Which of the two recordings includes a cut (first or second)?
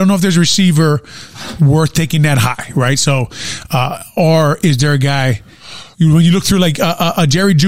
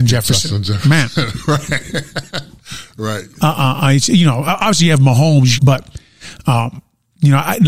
second